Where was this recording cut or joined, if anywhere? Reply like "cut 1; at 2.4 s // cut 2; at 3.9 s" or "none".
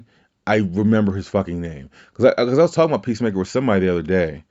none